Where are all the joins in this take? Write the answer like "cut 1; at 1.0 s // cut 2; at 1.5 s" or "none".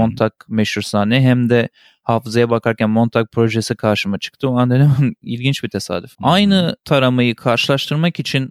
cut 1; at 6.1 s